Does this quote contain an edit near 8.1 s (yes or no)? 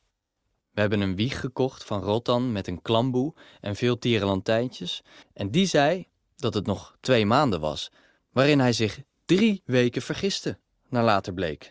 no